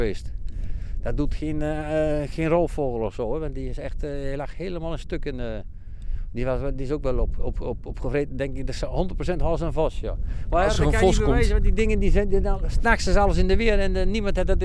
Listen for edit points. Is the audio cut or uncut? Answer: uncut